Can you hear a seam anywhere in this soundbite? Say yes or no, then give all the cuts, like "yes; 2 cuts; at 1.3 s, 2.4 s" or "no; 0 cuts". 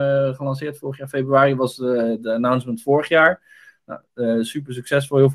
no; 0 cuts